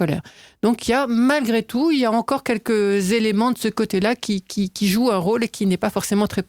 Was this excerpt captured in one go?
yes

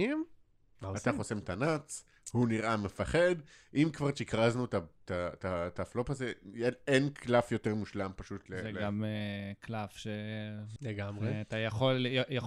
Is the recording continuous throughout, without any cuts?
no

